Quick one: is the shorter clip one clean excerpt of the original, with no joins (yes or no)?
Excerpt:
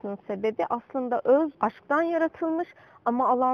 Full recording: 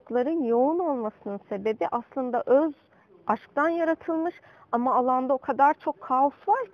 no